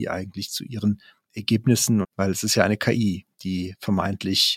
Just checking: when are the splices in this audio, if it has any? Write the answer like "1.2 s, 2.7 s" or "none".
2.0 s